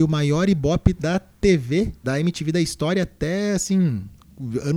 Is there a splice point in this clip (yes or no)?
yes